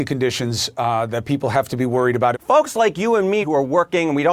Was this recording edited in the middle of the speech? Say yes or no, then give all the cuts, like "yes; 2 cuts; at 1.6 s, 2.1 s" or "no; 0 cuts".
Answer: yes; 2 cuts; at 2.3 s, 3.4 s